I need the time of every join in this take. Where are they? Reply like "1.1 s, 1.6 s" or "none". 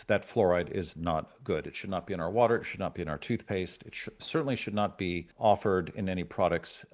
5.3 s

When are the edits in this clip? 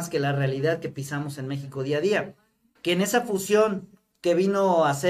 2.8 s

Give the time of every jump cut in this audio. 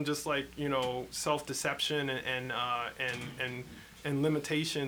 none

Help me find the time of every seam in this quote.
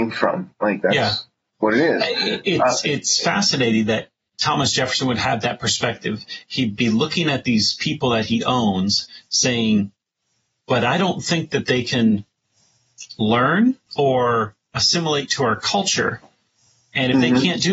10.6 s, 13.9 s

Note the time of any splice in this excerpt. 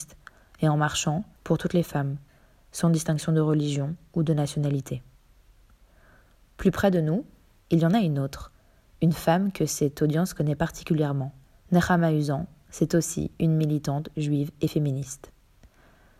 1.4 s, 7.6 s, 11.6 s

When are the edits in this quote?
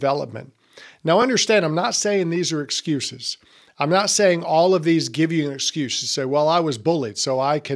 none

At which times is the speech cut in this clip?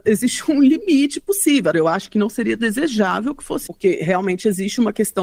1.7 s, 3.7 s

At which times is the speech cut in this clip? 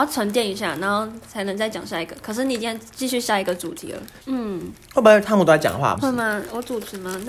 4.2 s, 6.0 s

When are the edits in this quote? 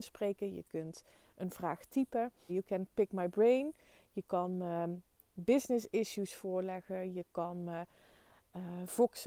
2.5 s

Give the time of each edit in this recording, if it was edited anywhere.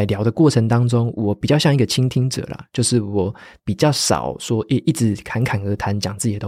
none

